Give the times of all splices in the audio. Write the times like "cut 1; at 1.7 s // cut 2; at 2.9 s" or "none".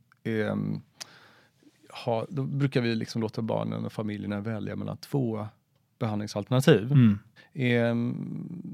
cut 1; at 7.4 s

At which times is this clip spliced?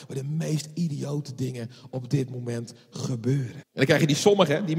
cut 1; at 3.6 s

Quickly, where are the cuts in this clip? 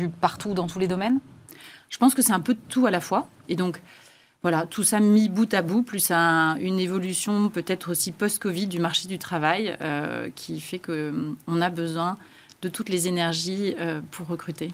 cut 1; at 3.5 s

